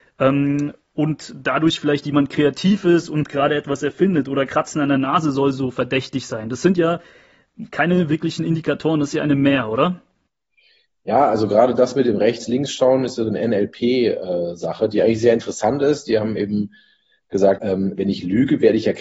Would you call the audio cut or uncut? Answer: cut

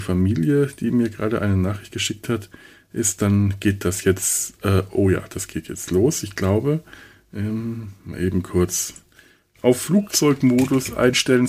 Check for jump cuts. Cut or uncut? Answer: uncut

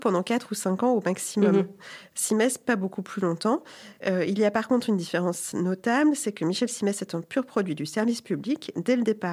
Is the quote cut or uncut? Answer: uncut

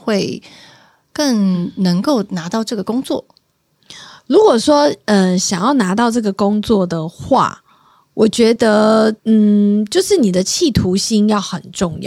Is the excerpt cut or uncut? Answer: cut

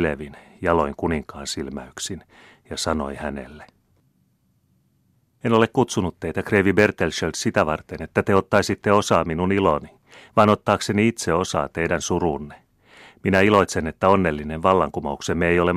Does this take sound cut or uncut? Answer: uncut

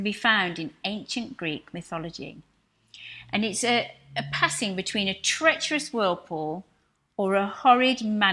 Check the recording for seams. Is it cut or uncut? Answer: uncut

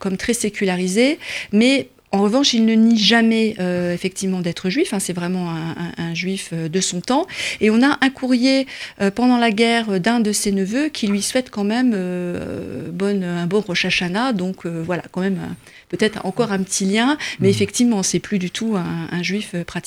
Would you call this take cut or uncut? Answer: uncut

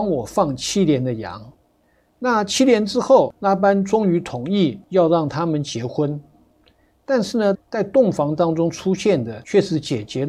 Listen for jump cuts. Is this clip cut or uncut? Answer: cut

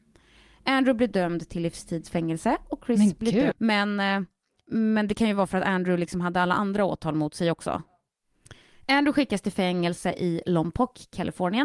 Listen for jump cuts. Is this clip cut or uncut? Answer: cut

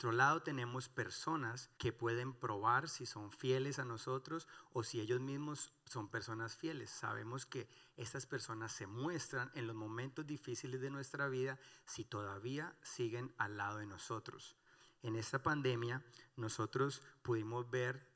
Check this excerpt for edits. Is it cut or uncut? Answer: cut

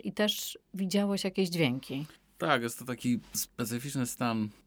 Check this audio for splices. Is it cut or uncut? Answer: uncut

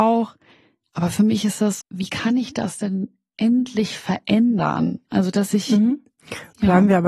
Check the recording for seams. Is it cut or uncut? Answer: cut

